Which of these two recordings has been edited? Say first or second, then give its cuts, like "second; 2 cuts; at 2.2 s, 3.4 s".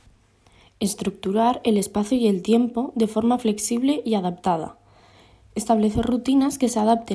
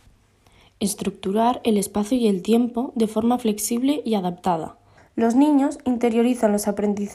second; 1 cut; at 5.0 s